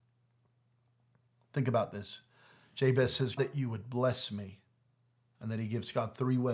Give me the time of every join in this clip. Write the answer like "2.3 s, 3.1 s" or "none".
3.4 s